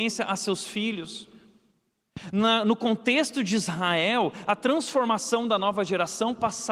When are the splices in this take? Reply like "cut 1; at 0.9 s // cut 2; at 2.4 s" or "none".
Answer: none